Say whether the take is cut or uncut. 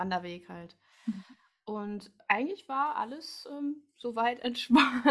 uncut